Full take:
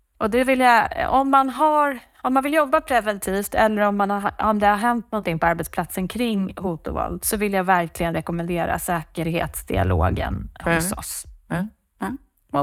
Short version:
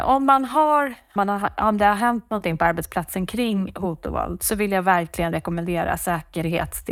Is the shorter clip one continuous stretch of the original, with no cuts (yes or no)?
no